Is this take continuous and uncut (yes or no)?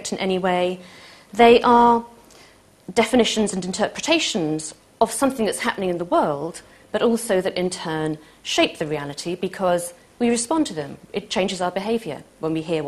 yes